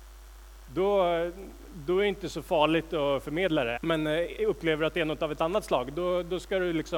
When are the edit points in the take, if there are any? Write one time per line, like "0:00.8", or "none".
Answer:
0:03.8